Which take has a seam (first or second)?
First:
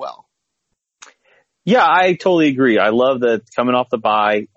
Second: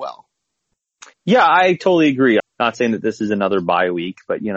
second